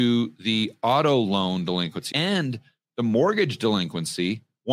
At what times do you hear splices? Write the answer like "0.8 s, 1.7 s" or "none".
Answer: 2.1 s